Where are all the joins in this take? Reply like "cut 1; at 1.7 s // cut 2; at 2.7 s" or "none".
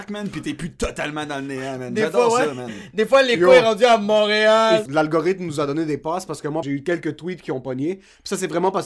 cut 1; at 4.9 s // cut 2; at 6.6 s